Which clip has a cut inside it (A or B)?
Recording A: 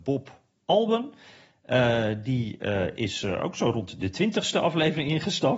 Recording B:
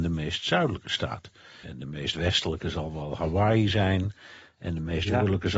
B